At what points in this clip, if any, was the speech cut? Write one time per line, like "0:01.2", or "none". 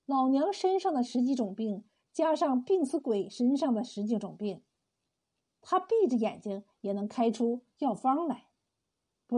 none

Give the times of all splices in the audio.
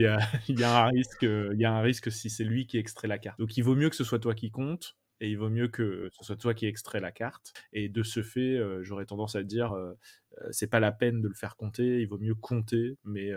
none

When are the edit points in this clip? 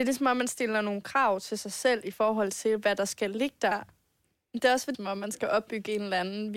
0:03.7
0:04.9

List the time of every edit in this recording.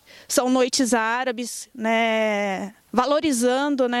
0:02.8

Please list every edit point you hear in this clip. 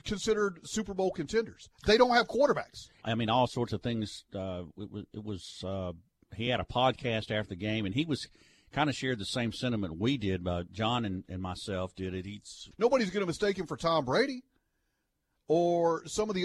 0:03.0
0:12.7

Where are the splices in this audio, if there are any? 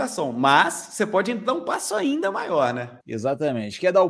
0:03.0

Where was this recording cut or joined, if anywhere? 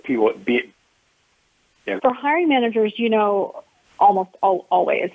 0:02.0
0:03.8

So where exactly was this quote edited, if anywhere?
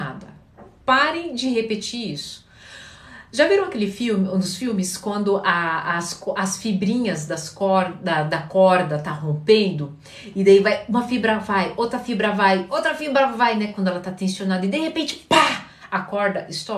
none

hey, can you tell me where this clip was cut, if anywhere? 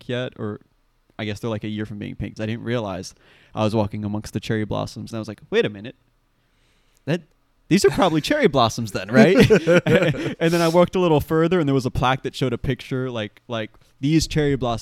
0:02.4
0:05.1

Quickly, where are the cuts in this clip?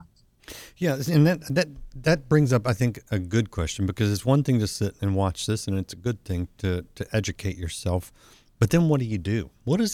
none

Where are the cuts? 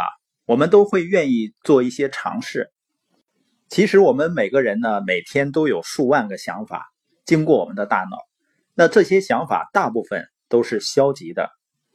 none

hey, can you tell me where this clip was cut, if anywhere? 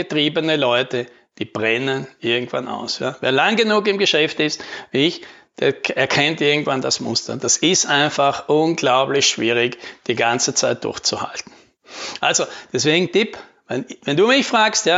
none

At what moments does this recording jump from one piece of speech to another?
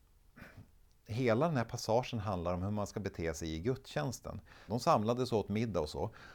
0:04.7

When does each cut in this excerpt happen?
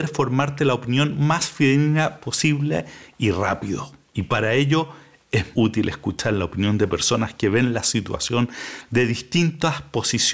0:05.5

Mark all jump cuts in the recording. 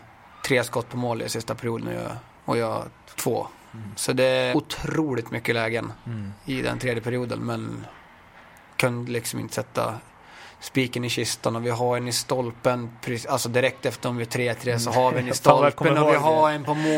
0:03.1
0:04.5

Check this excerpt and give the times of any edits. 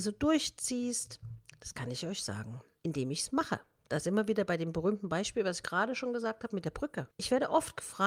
0:07.1

